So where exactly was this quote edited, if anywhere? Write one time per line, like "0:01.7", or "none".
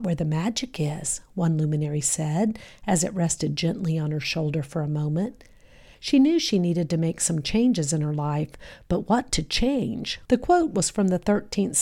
0:05.9
0:10.3